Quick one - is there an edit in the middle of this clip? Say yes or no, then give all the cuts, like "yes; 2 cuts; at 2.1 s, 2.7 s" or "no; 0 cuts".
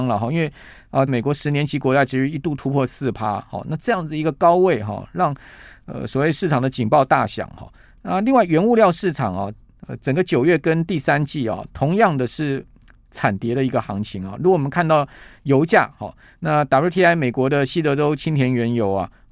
yes; 1 cut; at 1.1 s